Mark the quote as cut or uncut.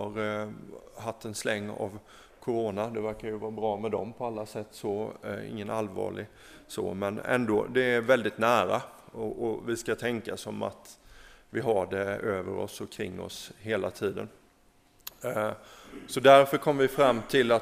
uncut